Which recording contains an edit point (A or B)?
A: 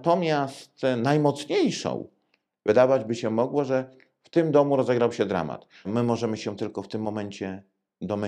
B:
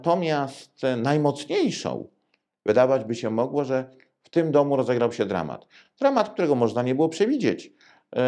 A